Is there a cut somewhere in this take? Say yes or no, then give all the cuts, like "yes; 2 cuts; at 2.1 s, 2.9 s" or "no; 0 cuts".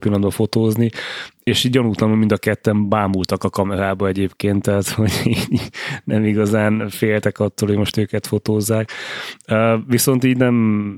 no; 0 cuts